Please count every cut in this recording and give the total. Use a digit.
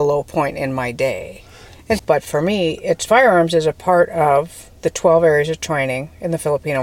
1